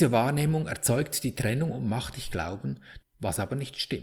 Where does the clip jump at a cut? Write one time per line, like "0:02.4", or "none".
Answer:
0:03.0